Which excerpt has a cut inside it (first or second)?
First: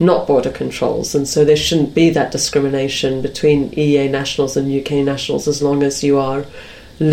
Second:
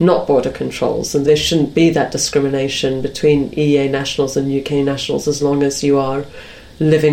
second